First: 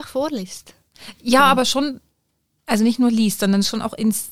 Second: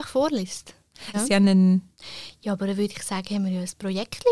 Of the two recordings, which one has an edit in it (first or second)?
second